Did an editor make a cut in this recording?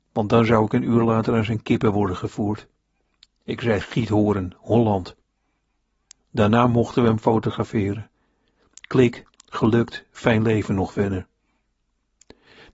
no; 0 cuts

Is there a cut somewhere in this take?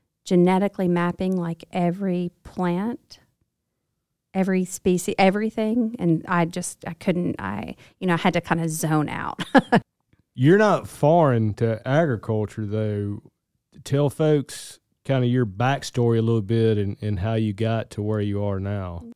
no; 0 cuts

